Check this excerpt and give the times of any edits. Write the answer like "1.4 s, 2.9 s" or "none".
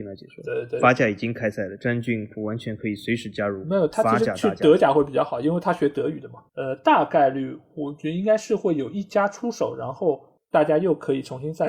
6.5 s